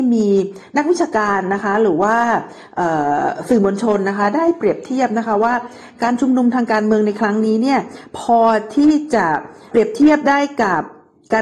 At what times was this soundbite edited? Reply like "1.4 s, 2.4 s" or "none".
9.7 s